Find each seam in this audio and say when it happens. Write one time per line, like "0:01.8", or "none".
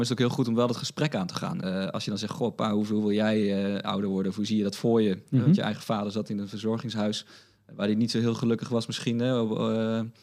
none

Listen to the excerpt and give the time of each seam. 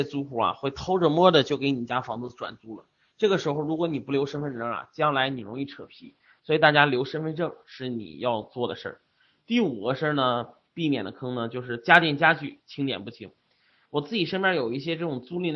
none

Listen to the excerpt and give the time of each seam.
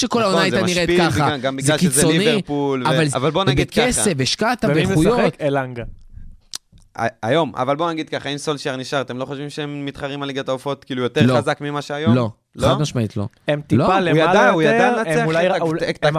0:03.1

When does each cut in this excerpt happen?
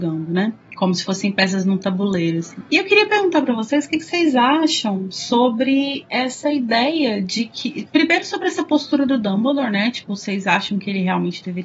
none

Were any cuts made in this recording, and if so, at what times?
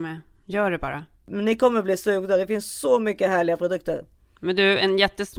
none

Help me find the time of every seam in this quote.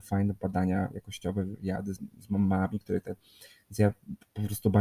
none

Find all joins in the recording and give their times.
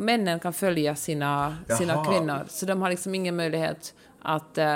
none

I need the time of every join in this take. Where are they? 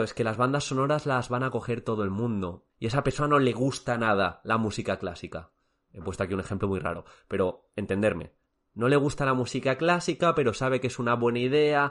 0:02.7

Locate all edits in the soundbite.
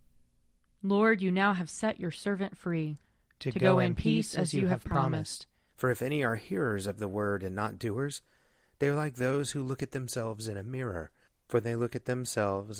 0:05.7

